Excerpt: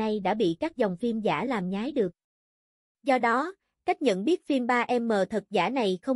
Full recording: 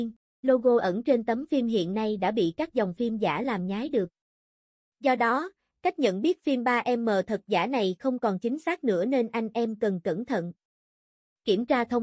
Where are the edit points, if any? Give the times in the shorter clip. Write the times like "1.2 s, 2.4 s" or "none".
none

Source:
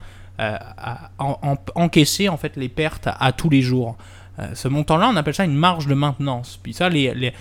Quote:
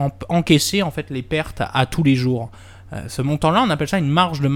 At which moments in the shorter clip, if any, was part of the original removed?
none

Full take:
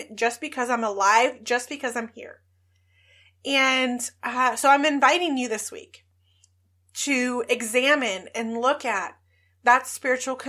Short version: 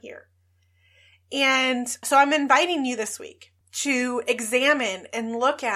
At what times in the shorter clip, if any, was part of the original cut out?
2.0 s, 3.6 s

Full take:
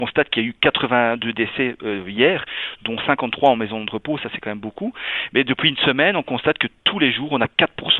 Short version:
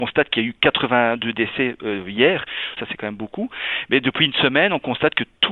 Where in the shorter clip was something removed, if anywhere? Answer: 2.8 s

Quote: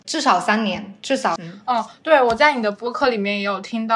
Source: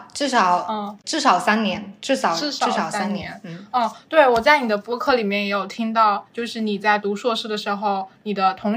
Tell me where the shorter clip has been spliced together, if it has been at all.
1.4 s

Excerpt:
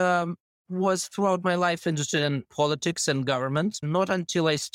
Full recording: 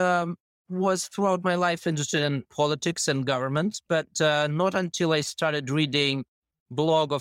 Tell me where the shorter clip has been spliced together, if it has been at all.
3.8 s

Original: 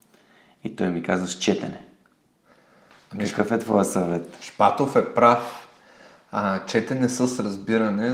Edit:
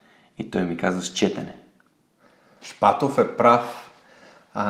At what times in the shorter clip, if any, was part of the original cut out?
2.6 s

